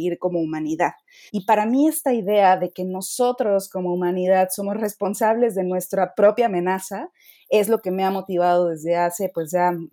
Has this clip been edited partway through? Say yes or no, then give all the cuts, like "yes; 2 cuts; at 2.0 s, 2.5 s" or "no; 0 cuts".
yes; 1 cut; at 1.3 s